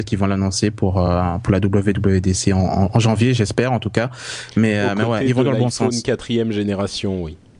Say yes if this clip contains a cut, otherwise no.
no